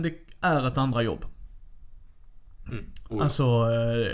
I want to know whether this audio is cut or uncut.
cut